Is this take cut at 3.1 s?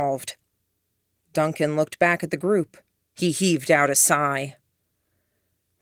yes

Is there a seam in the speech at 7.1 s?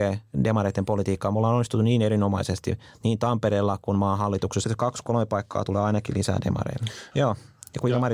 yes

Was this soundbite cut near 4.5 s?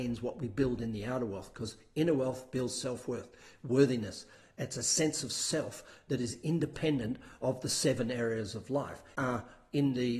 no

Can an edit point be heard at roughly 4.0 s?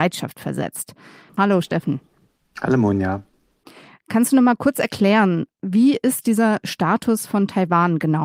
no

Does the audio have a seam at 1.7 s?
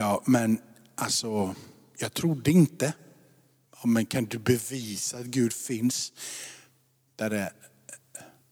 no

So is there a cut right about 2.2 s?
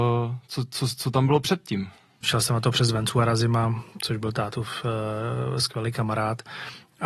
yes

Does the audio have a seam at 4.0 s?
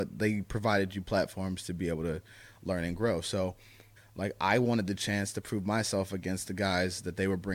yes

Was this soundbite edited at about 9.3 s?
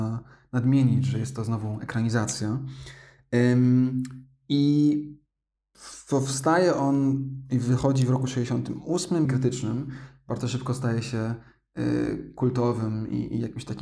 yes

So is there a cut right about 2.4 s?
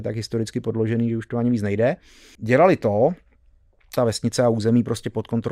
yes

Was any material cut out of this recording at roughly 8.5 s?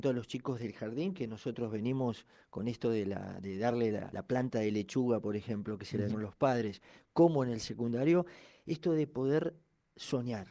no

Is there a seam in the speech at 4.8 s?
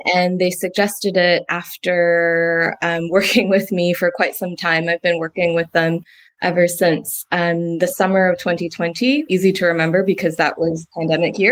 no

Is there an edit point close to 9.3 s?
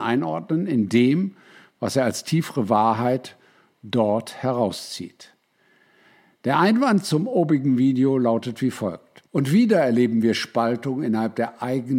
yes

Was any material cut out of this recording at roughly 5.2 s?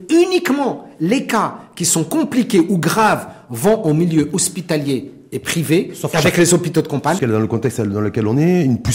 no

